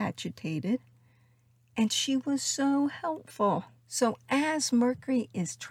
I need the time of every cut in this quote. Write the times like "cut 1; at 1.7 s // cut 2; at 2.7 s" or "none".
none